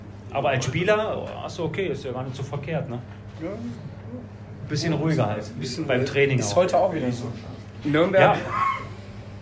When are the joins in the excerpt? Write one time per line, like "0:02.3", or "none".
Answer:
0:07.8